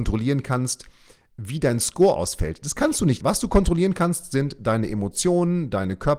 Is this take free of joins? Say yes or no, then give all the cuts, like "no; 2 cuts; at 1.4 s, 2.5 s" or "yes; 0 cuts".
no; 1 cut; at 3.2 s